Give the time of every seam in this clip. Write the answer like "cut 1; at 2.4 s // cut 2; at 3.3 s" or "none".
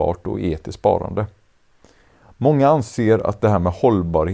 none

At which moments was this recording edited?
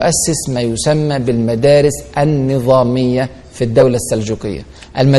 none

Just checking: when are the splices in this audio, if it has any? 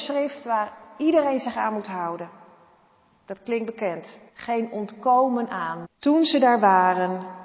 cut 1; at 4.3 s // cut 2; at 5.8 s

